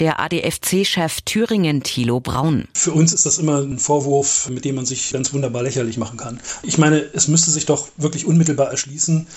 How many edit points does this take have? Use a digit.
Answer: 0